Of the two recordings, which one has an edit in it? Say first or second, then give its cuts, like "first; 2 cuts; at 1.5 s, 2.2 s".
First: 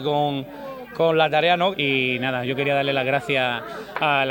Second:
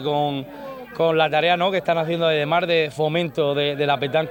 first; 1 cut; at 1.7 s